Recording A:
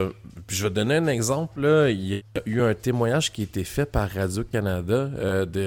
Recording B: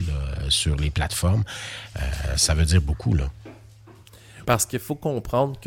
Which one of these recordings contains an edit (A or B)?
B